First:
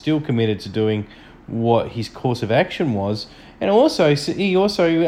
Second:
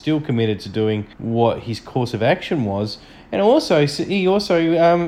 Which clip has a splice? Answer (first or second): second